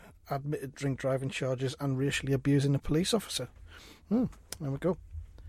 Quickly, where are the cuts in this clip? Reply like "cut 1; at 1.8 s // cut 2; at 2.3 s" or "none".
none